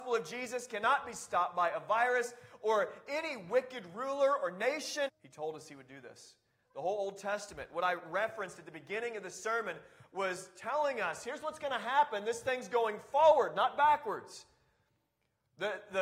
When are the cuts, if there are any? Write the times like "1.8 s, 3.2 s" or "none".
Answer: 5.1 s